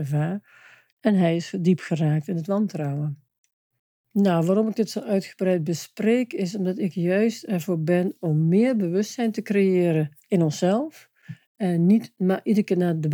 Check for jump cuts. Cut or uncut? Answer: uncut